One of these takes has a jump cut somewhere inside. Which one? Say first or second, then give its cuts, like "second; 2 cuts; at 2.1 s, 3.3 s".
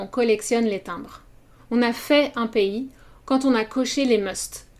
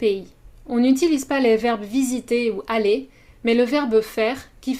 first; 1 cut; at 1.6 s